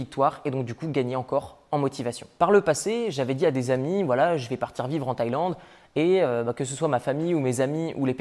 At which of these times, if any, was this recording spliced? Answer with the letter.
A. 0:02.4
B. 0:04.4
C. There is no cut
A